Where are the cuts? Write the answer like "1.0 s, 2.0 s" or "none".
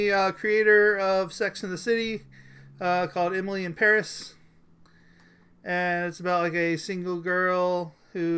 none